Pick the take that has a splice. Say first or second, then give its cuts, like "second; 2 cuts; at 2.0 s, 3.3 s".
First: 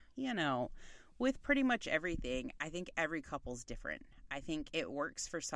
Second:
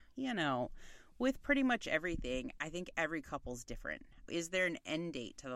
second; 1 cut; at 4.3 s